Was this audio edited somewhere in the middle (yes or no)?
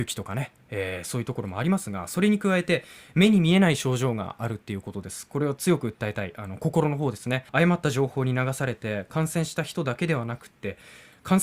yes